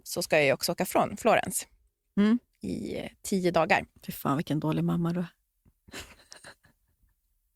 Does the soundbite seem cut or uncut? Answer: uncut